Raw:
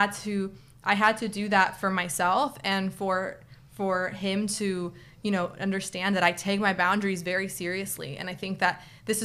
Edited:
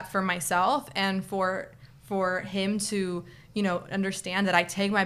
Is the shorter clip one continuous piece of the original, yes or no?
yes